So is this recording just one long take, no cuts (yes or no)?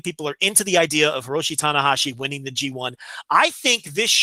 yes